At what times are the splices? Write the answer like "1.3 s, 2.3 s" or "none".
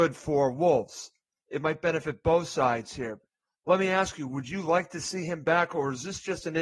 none